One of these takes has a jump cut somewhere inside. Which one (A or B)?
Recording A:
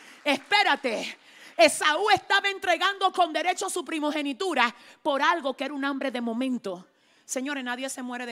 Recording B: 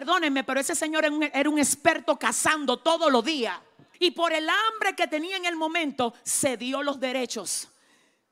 B